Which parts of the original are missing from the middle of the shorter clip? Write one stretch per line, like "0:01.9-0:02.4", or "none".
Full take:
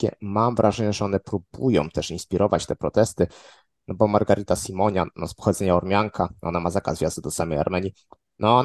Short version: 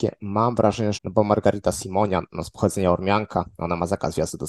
0:00.9-0:03.8